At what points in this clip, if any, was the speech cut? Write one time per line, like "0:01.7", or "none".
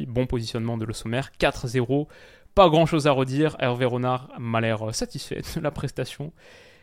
none